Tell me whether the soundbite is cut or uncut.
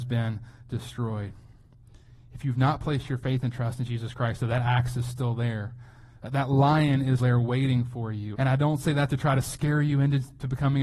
cut